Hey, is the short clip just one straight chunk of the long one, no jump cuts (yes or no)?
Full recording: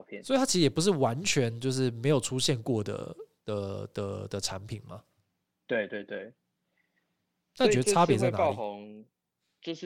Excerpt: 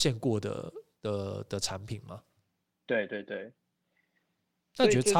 no